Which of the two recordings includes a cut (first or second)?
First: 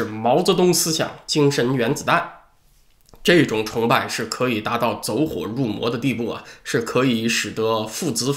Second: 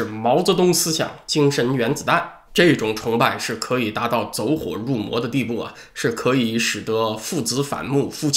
second